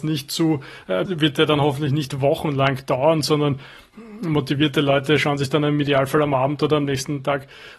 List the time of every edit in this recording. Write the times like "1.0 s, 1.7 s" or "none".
1.1 s